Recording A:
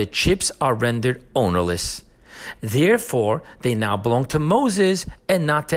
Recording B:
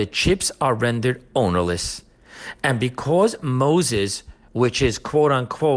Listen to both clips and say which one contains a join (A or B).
A